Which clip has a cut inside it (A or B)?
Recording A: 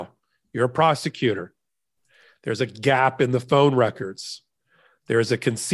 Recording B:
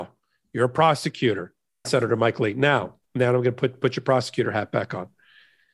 B